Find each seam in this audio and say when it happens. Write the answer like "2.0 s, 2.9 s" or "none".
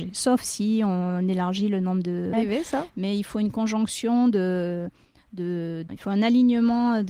2.3 s, 5.9 s